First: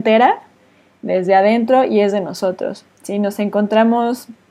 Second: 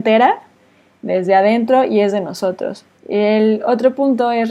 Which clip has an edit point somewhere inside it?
second; 1 cut; at 3.0 s

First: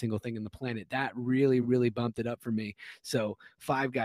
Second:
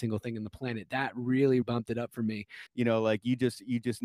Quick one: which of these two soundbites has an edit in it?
second; 2 cuts; at 1.6 s, 2.7 s

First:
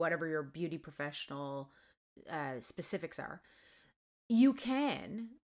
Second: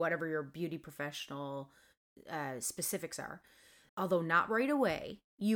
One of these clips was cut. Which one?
second; 1 cut; at 3.9 s

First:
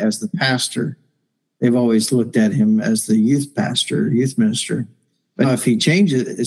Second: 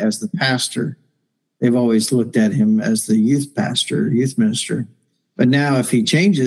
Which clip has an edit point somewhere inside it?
first; 1 cut; at 5.4 s

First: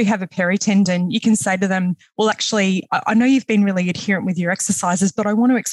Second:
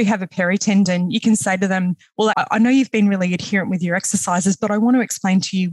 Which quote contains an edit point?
second; 1 cut; at 2.3 s

